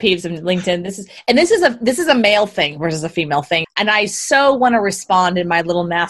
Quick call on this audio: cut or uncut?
cut